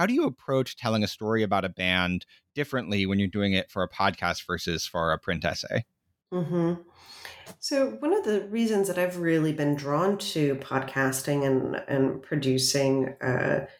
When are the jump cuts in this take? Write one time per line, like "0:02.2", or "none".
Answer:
none